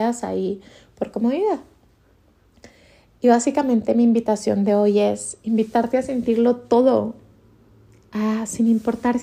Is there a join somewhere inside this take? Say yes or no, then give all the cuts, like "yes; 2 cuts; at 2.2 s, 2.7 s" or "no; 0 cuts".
no; 0 cuts